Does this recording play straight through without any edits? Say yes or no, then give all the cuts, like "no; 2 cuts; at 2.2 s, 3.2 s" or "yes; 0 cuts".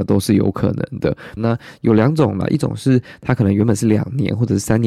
no; 1 cut; at 1.4 s